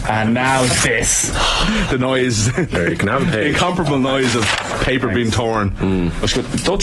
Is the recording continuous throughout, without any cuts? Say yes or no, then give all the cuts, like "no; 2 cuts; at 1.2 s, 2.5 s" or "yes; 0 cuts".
yes; 0 cuts